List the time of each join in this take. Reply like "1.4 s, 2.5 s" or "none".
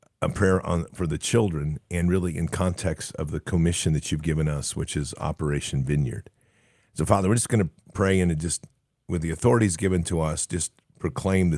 none